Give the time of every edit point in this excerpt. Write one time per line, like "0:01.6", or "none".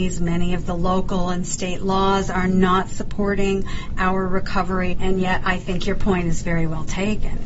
0:04.9